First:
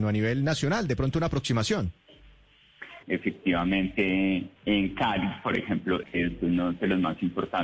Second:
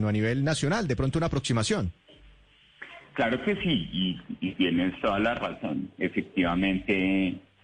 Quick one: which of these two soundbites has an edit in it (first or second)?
first